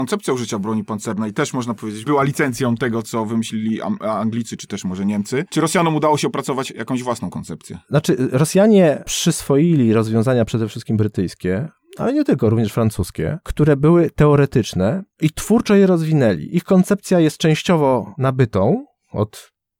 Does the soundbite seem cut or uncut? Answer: uncut